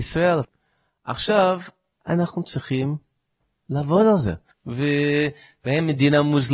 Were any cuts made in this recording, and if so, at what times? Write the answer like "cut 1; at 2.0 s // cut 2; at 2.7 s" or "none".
cut 1; at 1.9 s // cut 2; at 4.5 s